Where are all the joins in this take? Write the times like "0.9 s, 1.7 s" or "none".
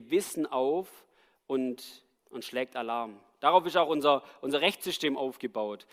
2.1 s